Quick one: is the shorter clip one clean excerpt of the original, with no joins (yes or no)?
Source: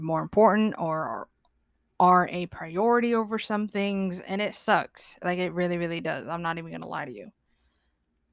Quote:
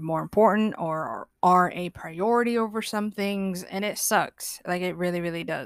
no